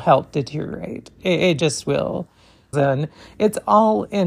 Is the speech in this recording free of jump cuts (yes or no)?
no